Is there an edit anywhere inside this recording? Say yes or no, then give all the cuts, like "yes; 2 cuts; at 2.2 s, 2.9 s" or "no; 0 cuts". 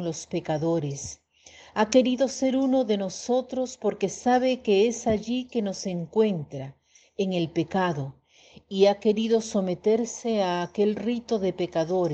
no; 0 cuts